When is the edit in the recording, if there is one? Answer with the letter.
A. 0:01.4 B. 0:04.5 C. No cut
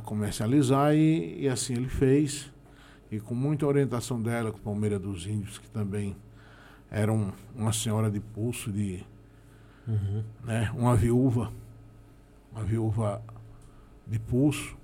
B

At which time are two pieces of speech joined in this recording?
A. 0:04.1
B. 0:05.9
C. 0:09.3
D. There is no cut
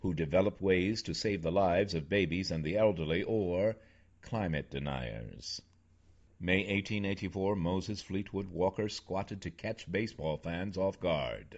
D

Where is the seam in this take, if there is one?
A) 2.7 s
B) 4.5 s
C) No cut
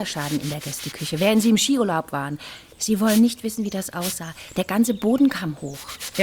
C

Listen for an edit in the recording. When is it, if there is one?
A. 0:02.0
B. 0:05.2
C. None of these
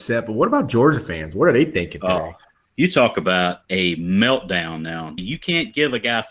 B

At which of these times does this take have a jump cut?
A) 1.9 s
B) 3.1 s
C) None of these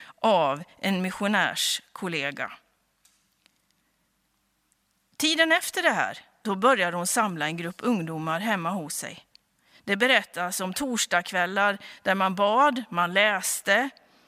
C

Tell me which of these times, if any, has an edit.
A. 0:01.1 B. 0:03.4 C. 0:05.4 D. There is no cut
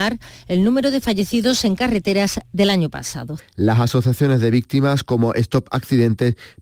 B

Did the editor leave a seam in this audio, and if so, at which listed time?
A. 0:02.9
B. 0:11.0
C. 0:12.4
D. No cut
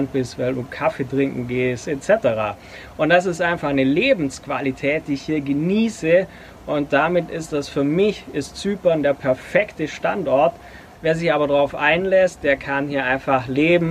B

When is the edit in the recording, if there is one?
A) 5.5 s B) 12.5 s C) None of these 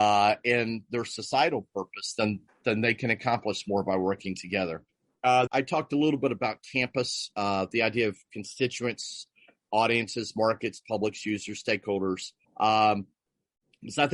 A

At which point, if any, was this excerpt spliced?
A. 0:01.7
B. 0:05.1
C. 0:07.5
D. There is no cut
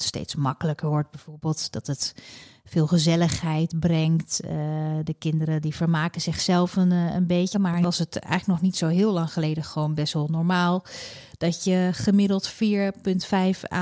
C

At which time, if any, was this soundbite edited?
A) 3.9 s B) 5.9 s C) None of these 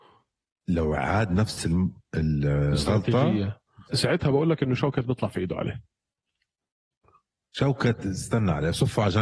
A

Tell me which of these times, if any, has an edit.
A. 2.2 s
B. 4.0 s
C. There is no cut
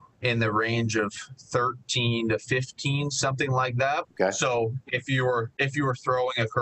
B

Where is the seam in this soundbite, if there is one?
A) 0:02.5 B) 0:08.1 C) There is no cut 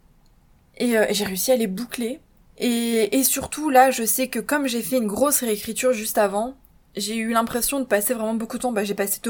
A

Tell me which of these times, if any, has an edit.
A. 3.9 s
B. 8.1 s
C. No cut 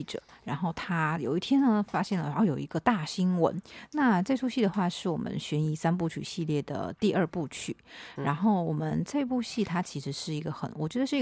A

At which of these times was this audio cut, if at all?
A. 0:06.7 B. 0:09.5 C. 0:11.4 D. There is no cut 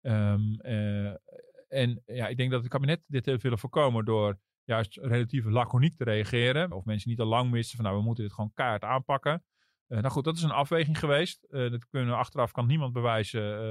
A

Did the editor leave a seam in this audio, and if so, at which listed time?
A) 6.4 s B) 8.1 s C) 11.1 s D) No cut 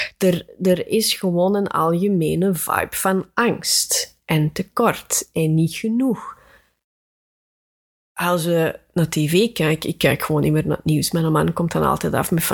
D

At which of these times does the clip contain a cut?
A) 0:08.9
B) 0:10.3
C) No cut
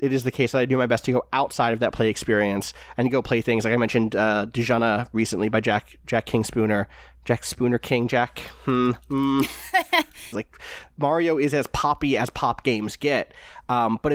B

